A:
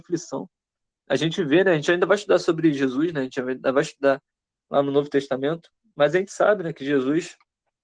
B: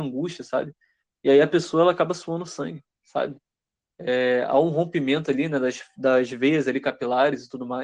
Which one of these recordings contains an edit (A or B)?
B